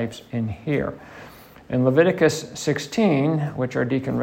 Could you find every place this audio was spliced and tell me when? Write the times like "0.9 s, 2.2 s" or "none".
none